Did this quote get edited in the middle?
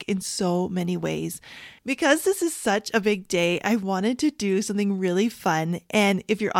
yes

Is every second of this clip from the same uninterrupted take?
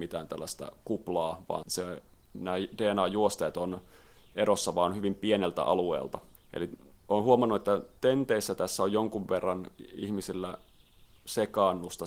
no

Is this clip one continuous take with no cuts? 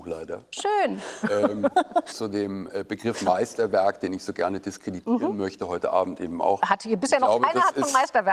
no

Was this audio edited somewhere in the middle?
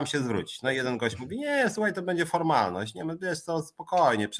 no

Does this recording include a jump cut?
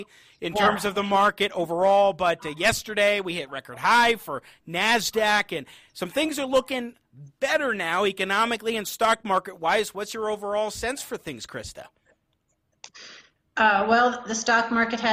no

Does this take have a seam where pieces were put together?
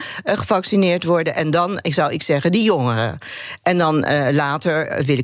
no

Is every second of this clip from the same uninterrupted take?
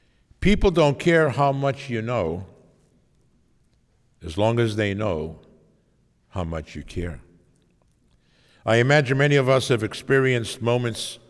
yes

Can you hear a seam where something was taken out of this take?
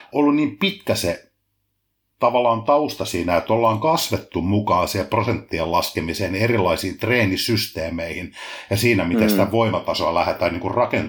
no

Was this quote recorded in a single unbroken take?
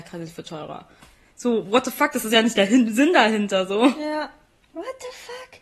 yes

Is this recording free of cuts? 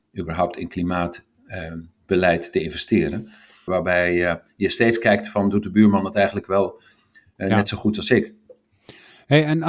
no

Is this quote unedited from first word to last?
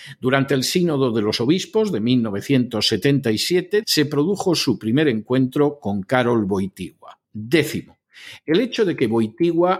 no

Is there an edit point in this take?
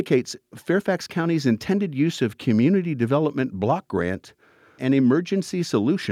yes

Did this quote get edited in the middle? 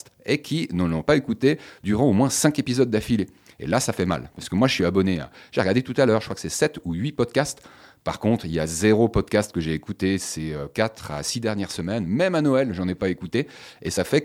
no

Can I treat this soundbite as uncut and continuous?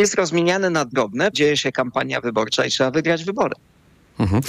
no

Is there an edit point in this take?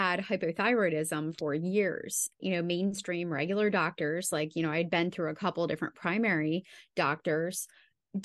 yes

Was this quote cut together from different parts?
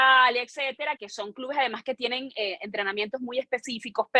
yes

